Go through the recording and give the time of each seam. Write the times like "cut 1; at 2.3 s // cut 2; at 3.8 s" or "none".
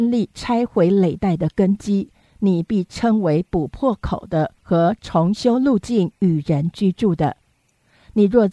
none